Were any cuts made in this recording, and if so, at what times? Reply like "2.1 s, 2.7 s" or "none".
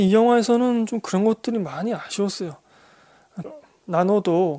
3.4 s